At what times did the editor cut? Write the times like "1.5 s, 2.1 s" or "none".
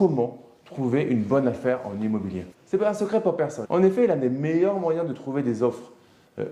2.5 s, 3.6 s